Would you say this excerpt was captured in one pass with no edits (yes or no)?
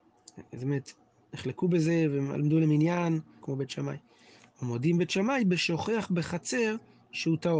no